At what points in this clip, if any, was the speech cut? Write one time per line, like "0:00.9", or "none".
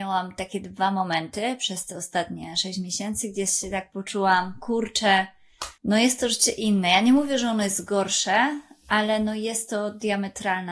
0:05.8